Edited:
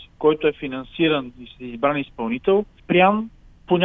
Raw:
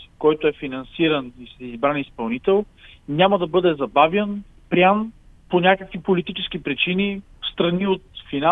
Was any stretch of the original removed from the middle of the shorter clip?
yes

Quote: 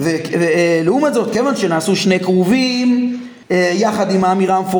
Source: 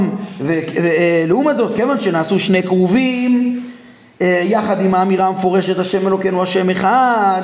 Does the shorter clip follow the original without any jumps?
no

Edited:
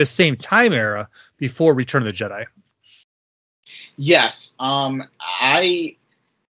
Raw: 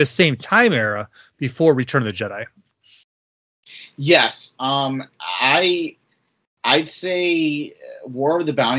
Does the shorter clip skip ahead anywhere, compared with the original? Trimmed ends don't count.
no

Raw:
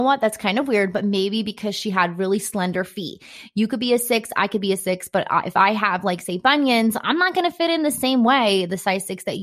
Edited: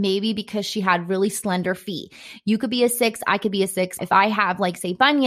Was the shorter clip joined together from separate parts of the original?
yes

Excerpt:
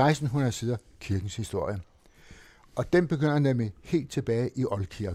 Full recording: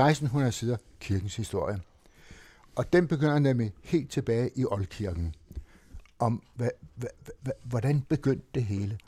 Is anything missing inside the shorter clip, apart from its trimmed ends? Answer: no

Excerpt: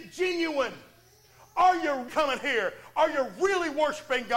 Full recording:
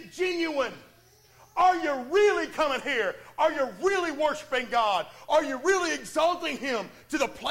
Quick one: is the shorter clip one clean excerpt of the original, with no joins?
no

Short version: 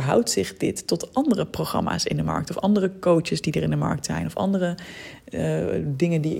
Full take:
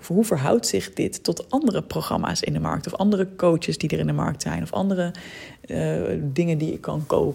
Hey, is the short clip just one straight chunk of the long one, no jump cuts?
yes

